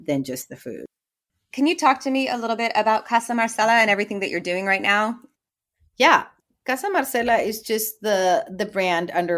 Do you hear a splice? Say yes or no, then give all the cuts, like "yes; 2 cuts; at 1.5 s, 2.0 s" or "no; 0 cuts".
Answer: no; 0 cuts